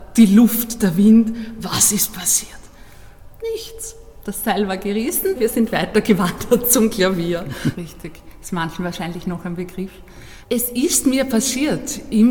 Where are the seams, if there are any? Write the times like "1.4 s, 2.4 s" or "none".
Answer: 5.4 s, 7.7 s, 10.4 s